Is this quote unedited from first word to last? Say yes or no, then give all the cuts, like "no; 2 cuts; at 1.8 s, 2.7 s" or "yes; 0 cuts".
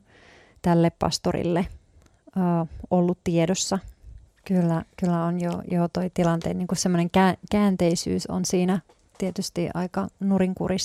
no; 1 cut; at 4.3 s